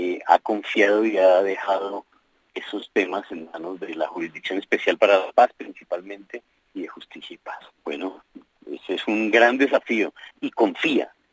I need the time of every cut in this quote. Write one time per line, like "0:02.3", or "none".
0:07.8
0:10.3